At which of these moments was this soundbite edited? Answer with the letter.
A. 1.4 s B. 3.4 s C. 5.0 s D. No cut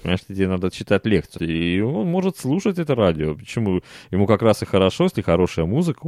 A